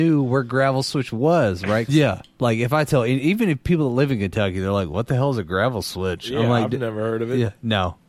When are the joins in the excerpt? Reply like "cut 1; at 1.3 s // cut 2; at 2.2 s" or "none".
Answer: cut 1; at 1.9 s